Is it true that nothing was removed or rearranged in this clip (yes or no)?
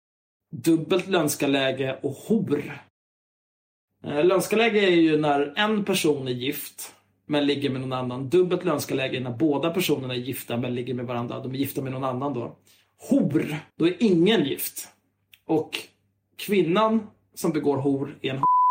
no